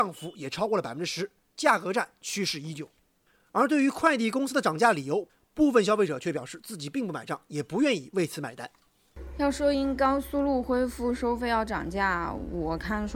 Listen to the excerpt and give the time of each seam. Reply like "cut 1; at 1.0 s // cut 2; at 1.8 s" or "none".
none